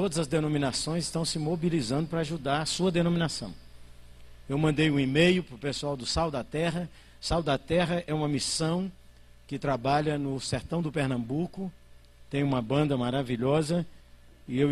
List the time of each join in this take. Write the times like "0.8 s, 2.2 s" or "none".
none